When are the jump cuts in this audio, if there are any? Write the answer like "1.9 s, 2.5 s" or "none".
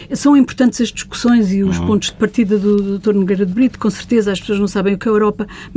none